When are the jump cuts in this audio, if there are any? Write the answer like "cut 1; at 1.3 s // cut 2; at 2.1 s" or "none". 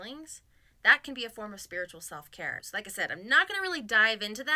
cut 1; at 2.6 s